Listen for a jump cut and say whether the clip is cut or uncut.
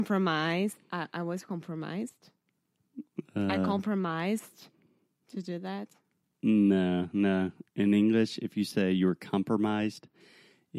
uncut